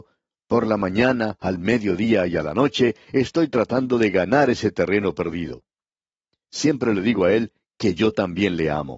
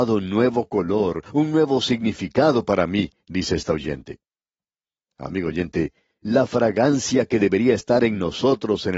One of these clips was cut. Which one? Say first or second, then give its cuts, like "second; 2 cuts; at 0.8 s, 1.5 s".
second; 1 cut; at 6.2 s